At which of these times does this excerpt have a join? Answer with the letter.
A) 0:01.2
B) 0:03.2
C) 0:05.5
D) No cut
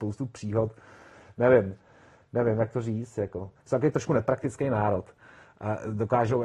D